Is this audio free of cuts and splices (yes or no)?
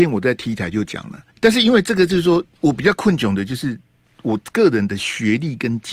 no